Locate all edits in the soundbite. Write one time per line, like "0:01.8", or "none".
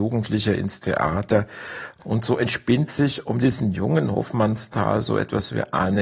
none